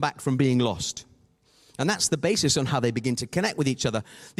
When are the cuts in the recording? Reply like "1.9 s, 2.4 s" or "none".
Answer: none